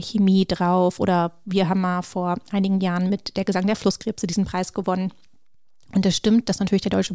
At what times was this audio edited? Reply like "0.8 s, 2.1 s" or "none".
none